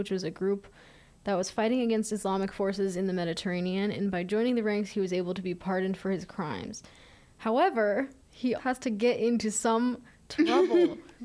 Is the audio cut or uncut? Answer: cut